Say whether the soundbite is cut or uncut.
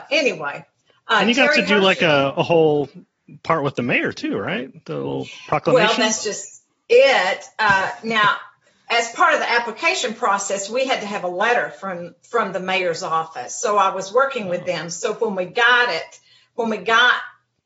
uncut